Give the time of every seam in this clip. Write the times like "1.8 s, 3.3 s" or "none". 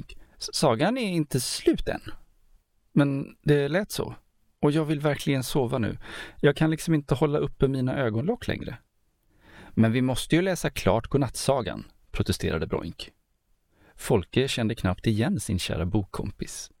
2.8 s